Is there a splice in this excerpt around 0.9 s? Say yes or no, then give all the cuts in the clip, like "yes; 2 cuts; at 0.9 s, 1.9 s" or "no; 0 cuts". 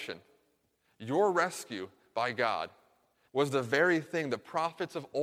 no; 1 cut; at 3.3 s